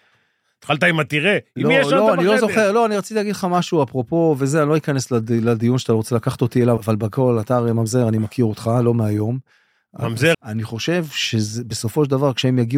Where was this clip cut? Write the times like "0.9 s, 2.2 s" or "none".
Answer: 6.8 s, 10.3 s